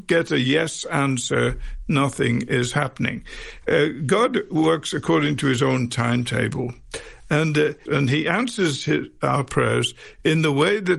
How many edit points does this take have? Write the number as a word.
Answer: one